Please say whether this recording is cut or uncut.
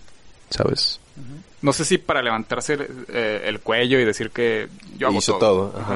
cut